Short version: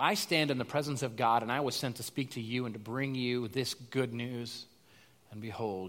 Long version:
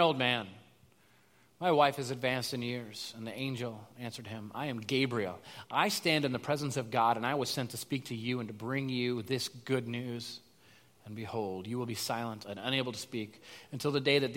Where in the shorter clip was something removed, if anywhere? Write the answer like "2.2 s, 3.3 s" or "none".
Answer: none